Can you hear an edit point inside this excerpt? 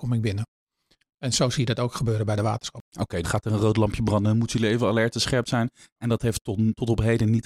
yes; 1 cut; at 3.2 s

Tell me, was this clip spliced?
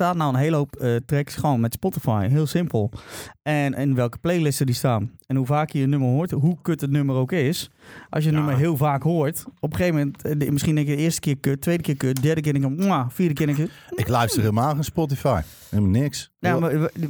no; 0 cuts

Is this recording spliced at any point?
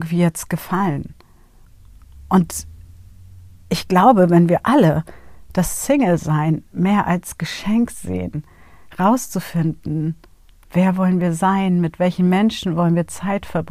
no; 0 cuts

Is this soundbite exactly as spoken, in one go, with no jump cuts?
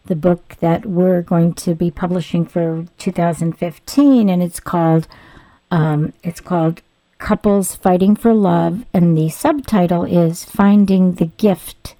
yes; 0 cuts

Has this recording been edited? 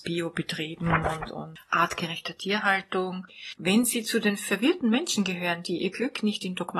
yes; 1 cut; at 3.6 s

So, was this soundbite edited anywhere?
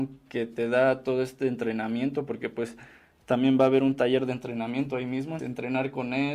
yes; 1 cut; at 5.4 s

